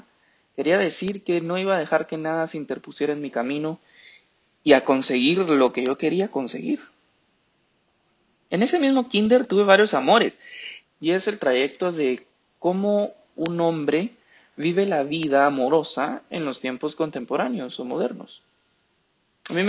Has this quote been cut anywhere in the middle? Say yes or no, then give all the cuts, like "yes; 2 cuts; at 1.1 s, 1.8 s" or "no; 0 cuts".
yes; 1 cut; at 10.8 s